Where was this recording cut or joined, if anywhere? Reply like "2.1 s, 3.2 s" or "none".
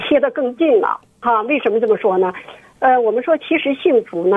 none